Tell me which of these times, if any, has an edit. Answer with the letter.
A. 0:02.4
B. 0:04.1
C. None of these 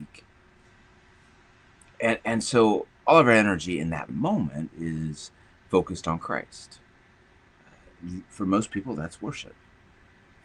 B